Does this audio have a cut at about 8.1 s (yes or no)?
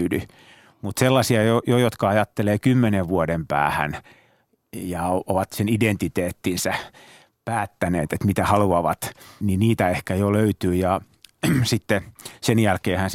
no